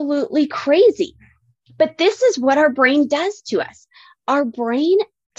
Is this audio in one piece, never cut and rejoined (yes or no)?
yes